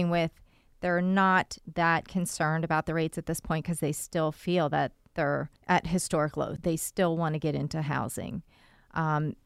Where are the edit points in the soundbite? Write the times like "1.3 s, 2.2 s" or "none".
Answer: 5.6 s, 6.6 s